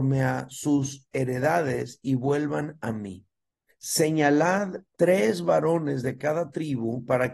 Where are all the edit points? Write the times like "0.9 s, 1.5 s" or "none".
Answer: 3.7 s, 4.9 s